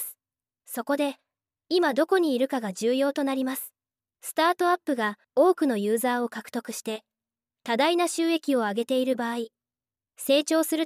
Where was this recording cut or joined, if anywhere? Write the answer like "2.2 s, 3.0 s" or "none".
5.2 s